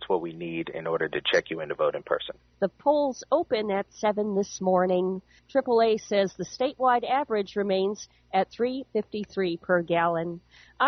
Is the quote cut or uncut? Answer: cut